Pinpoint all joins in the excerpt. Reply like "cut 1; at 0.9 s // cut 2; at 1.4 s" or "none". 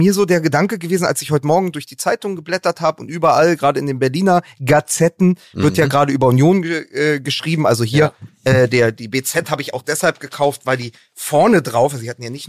none

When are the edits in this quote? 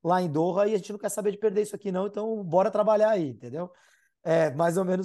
none

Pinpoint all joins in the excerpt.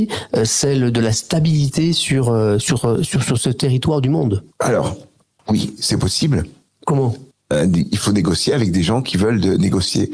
none

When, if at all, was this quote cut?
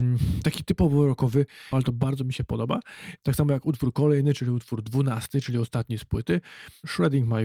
cut 1; at 1.7 s

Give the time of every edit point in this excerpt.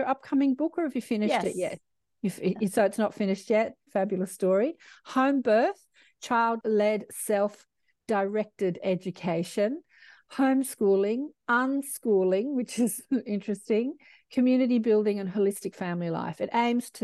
cut 1; at 3.9 s

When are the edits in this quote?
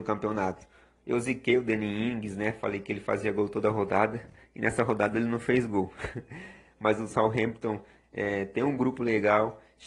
none

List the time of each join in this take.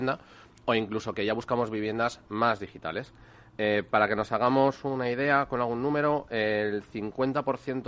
none

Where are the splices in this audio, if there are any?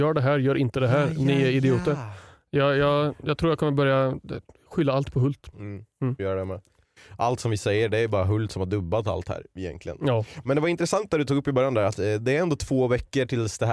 none

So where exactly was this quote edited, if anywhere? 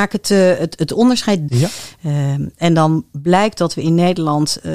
cut 1; at 1.5 s

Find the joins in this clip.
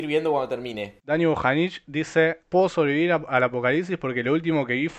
cut 1; at 1.0 s // cut 2; at 2.4 s

